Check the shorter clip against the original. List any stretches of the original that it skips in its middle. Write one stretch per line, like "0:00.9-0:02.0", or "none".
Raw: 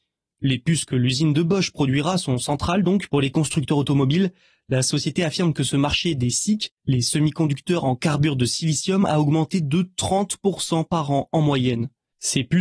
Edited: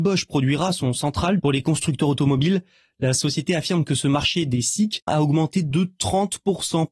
0:02.8-0:03.1
0:06.8-0:09.1